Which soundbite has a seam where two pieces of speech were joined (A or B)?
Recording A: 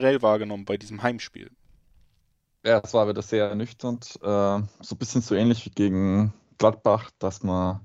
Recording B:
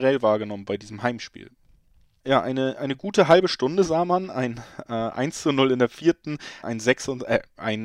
B